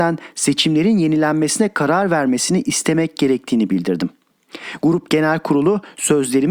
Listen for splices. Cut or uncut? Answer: uncut